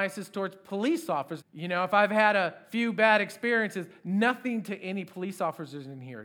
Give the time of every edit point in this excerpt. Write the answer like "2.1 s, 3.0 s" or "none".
1.4 s